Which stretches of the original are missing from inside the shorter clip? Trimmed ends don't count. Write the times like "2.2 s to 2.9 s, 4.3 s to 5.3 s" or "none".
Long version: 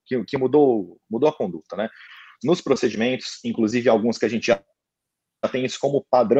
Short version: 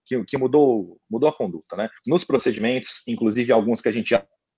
2.0 s to 2.3 s